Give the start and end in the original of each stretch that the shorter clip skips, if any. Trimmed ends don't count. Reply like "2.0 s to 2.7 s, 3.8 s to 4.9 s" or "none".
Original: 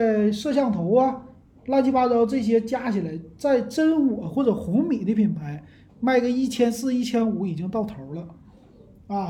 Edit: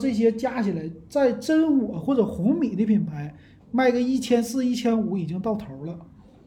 none